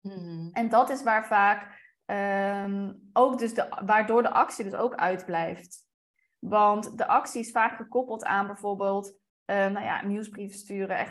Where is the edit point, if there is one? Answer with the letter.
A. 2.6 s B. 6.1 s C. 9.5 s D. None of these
D